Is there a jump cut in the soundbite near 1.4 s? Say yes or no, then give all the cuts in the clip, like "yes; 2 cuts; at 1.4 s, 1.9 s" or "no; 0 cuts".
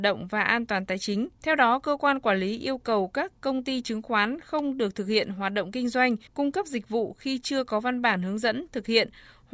yes; 2 cuts; at 1.4 s, 6.3 s